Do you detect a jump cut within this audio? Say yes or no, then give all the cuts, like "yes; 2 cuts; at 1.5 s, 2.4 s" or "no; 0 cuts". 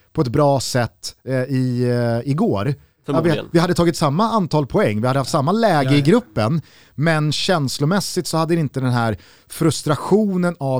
no; 0 cuts